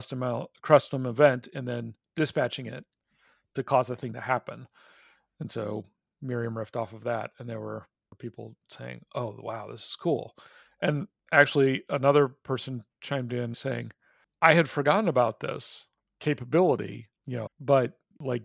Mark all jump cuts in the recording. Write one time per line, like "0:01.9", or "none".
0:13.5
0:17.5